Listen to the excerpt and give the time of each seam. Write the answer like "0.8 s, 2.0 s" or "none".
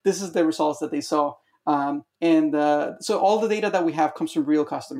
2.1 s